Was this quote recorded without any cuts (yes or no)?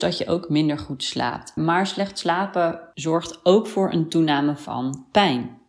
no